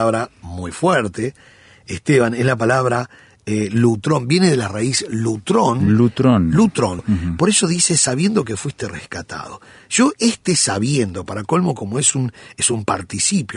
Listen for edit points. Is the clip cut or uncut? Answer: cut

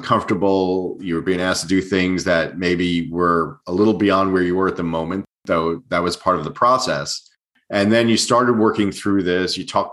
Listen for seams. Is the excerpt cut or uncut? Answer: uncut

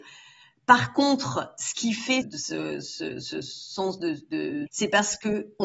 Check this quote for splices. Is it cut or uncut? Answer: cut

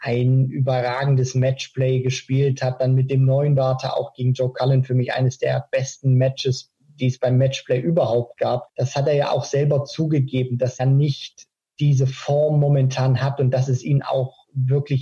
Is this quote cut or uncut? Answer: cut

